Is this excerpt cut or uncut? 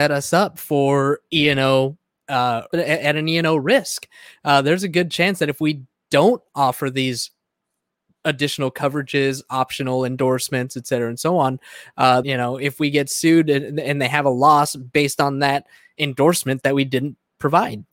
cut